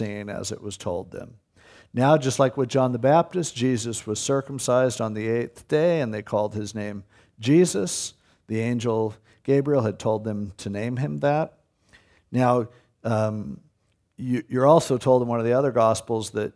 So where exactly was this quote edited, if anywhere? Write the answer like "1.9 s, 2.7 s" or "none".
none